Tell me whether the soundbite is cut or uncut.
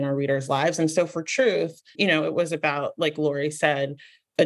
cut